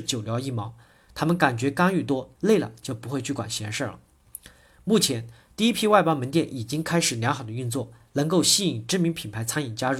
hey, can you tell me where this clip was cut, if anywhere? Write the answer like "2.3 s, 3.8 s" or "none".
0.9 s, 2.4 s